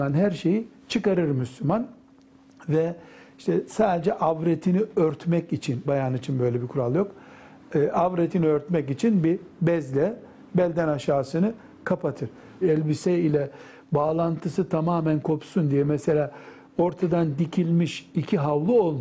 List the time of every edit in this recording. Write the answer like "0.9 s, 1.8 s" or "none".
5.8 s, 12.6 s